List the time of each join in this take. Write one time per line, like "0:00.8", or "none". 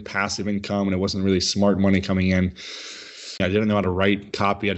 0:03.4